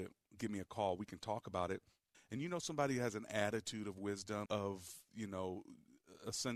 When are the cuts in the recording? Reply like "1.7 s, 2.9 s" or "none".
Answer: 2.1 s, 4.5 s